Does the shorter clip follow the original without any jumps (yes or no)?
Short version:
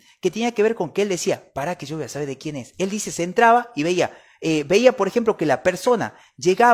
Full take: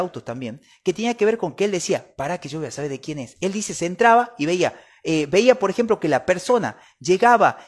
yes